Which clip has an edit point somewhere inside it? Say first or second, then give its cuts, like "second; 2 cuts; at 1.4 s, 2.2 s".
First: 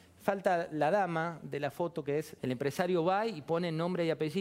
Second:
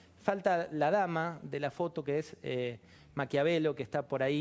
first; 1 cut; at 2.4 s